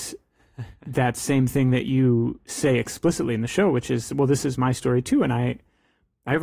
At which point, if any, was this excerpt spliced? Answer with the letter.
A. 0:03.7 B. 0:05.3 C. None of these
C